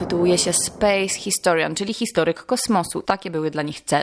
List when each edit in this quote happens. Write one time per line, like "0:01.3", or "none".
0:03.0